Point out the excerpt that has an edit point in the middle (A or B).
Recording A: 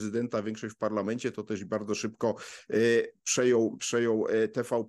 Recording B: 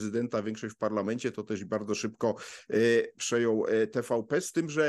B